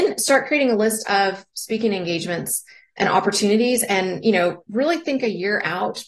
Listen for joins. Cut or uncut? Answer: uncut